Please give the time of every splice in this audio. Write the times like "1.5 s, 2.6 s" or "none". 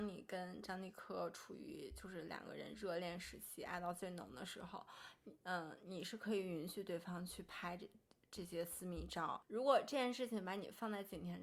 9.4 s